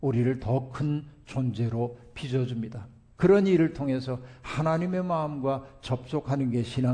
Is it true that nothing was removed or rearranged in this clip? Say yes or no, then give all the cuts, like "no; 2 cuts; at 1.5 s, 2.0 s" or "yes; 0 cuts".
no; 1 cut; at 3.1 s